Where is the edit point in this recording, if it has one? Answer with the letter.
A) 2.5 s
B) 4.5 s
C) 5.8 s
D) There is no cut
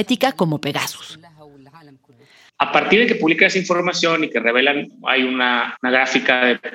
A